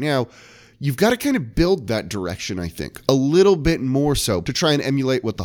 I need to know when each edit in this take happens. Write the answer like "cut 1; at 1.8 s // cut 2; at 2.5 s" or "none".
cut 1; at 4.4 s